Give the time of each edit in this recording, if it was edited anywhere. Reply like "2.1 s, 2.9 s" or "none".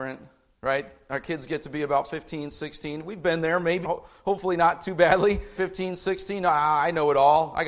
3.8 s, 5.6 s